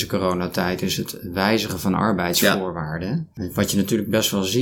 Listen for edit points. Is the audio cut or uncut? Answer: uncut